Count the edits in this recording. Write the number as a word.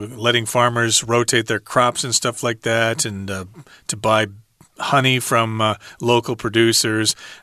zero